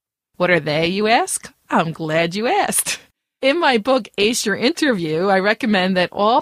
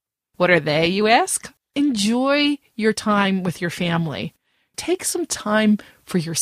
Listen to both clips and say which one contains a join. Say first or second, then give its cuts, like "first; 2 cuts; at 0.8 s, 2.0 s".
second; 2 cuts; at 1.6 s, 4.7 s